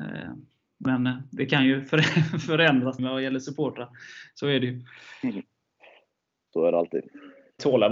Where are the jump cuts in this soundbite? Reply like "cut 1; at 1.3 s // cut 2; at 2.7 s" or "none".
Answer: cut 1; at 3.0 s